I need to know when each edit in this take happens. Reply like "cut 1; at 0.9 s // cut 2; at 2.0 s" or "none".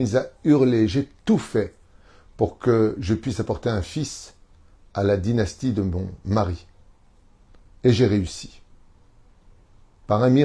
none